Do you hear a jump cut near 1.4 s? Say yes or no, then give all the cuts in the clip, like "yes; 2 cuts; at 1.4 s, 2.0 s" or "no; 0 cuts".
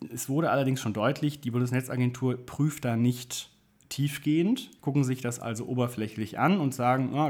no; 1 cut; at 4.8 s